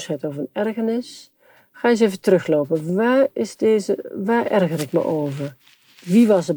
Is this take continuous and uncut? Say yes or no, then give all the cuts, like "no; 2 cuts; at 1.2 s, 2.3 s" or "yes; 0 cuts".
yes; 0 cuts